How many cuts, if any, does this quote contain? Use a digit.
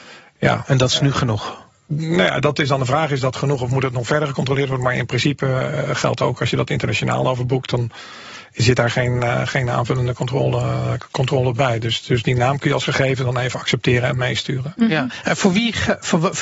0